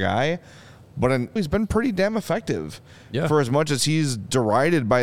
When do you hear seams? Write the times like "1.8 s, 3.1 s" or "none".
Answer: 1.4 s